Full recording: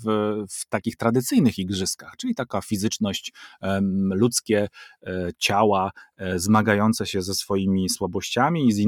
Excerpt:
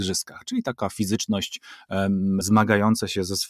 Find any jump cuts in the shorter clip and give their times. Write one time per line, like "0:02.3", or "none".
0:02.4